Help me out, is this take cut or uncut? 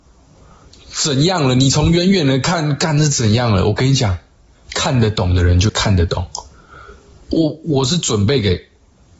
uncut